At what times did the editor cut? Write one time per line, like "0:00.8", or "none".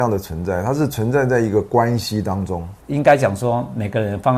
0:02.8